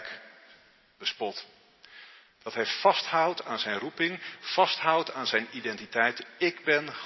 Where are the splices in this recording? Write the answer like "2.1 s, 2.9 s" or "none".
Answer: 2.4 s